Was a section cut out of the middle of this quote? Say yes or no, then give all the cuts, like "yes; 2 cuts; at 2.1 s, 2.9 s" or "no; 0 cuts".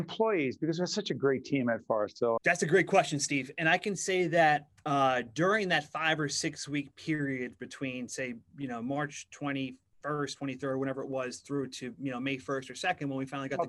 yes; 1 cut; at 2.4 s